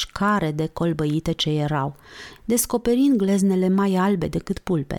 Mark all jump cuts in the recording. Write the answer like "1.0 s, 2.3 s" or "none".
2.4 s